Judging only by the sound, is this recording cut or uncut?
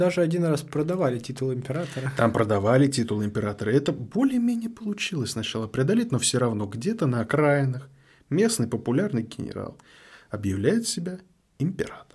uncut